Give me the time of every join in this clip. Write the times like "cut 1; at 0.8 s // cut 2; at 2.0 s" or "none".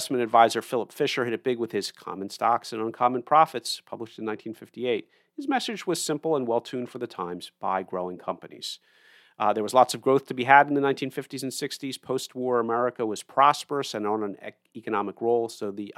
none

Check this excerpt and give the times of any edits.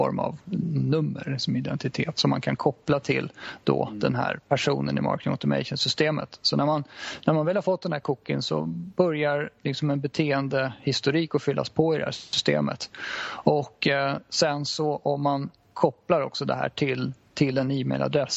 none

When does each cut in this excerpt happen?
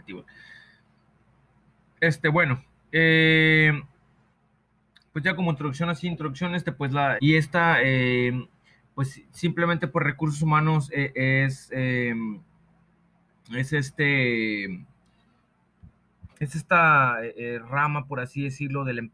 cut 1; at 7.2 s // cut 2; at 16.3 s

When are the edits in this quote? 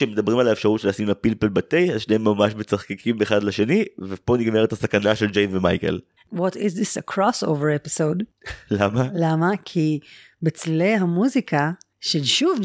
cut 1; at 6.2 s

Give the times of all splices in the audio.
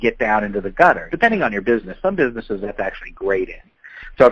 cut 1; at 1.1 s

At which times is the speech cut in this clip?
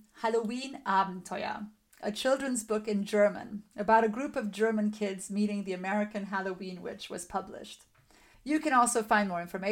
cut 1; at 8.3 s

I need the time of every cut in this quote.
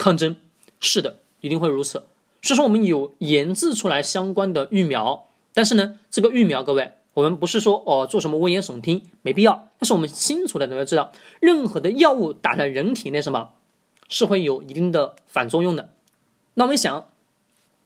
none

